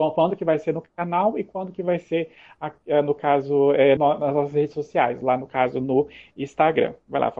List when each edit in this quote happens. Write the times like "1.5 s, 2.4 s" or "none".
4.0 s